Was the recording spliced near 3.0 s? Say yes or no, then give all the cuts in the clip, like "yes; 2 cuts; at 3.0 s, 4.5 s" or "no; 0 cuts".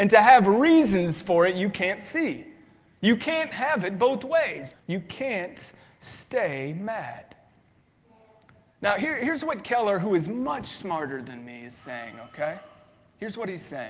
no; 1 cut; at 4.7 s